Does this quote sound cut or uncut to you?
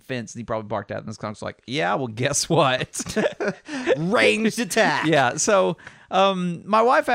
uncut